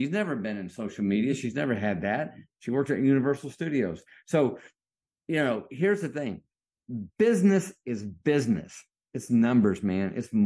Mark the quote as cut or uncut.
uncut